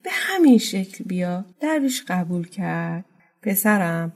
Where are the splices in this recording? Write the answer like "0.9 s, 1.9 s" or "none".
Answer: 1.5 s